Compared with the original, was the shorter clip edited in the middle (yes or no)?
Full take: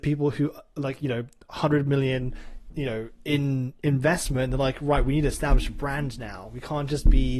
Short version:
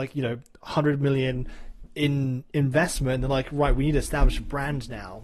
yes